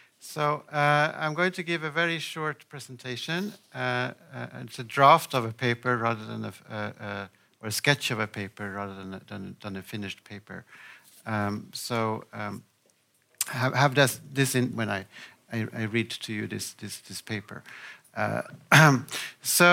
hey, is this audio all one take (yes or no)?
no